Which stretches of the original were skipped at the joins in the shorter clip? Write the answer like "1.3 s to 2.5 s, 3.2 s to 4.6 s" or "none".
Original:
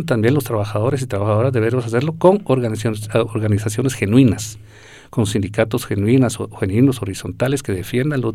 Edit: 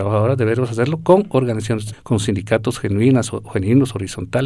3.1 s to 5.0 s

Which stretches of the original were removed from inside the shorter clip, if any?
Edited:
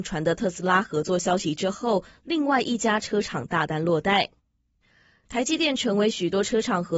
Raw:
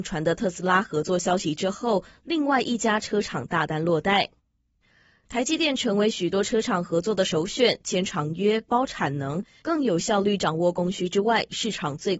none

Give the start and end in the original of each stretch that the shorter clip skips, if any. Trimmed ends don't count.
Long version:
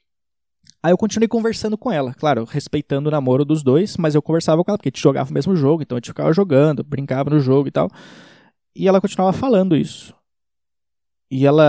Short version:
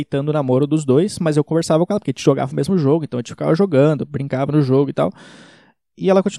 none

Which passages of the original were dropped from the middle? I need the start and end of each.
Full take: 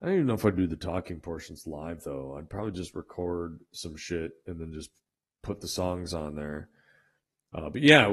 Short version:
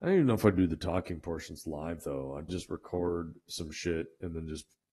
2.5 s to 2.7 s

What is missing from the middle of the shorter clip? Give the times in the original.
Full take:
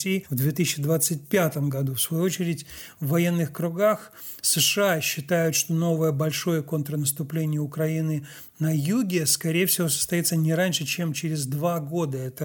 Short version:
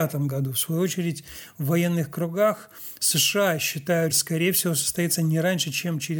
5.5 s to 9.2 s

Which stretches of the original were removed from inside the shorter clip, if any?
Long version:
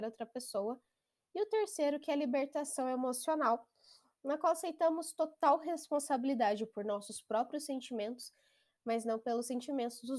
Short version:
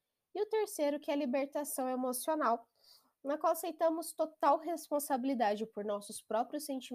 none

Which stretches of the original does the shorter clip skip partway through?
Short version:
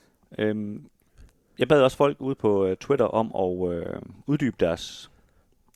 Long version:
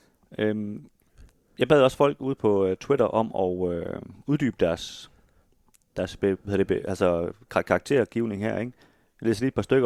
none

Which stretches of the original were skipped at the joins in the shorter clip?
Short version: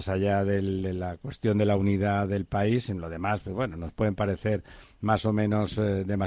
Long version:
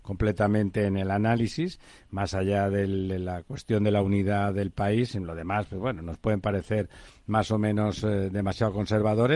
none

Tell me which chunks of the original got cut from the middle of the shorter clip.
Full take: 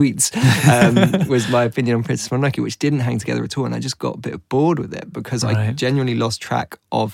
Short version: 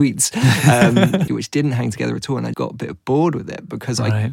1.3 s to 2.6 s, 3.8 s to 4.0 s

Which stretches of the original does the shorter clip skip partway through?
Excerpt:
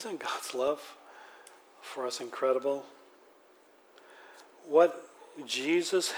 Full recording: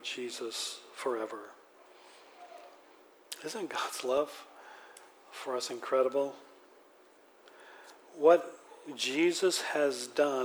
none

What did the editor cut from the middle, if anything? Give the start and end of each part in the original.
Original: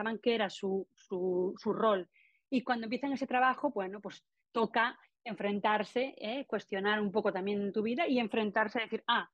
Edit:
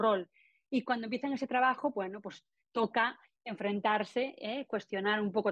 none

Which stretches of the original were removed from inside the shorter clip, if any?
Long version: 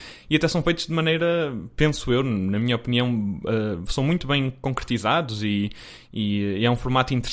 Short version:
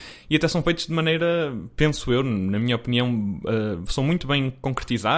none

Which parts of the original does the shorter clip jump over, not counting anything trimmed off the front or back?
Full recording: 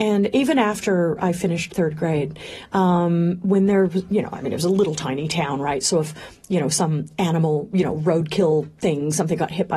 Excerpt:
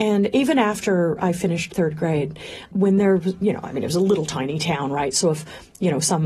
2.7 s to 3.4 s

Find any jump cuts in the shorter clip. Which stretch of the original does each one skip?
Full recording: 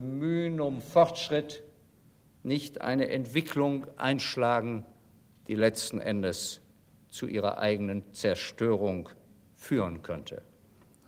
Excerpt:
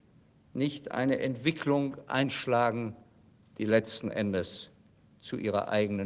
none

